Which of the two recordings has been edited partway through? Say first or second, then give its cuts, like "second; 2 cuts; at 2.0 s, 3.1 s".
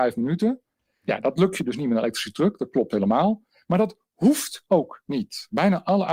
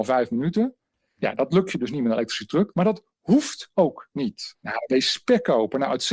second; 2 cuts; at 2.7 s, 4.5 s